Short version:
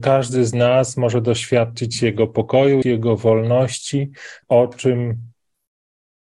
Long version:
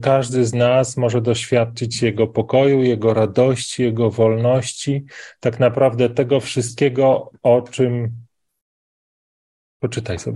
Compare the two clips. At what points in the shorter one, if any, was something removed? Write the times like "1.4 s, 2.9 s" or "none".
2.8 s, 4.4 s